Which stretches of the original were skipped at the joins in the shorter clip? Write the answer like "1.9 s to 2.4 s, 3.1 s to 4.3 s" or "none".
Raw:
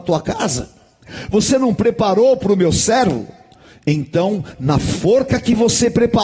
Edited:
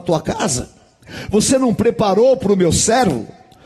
none